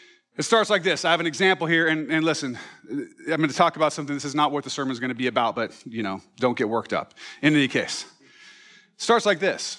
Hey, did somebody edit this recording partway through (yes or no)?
no